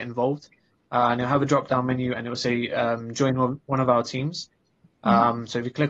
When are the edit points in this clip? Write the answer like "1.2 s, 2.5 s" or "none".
none